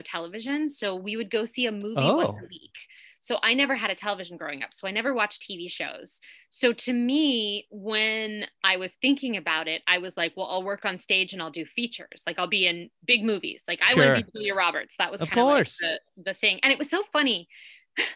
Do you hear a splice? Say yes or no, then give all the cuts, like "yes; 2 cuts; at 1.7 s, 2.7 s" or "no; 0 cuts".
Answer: no; 0 cuts